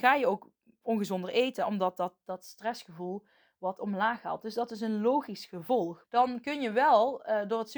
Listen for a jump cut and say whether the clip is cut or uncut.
cut